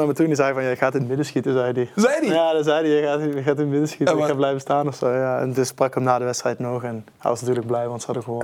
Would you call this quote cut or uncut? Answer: uncut